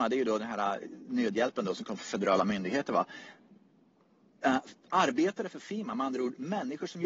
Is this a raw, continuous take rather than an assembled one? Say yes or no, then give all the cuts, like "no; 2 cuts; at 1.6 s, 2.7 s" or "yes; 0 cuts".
yes; 0 cuts